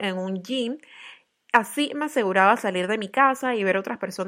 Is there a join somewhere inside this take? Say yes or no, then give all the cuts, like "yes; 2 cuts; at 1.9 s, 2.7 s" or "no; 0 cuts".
no; 0 cuts